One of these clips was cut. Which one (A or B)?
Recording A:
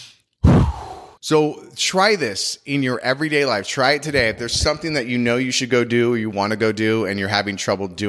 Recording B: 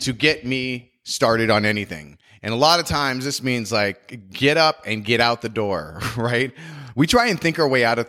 A